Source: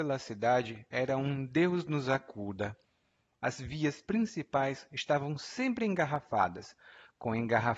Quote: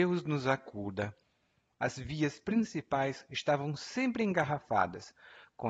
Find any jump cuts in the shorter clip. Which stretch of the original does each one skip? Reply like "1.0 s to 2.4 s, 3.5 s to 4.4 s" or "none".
none